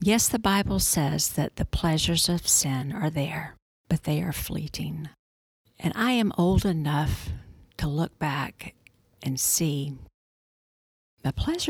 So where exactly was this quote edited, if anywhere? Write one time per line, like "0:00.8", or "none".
none